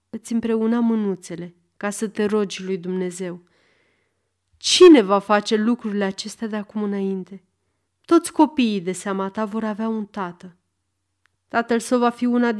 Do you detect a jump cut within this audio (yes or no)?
yes